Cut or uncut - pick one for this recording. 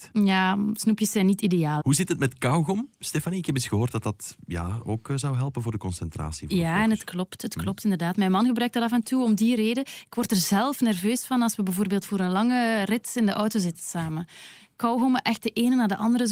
cut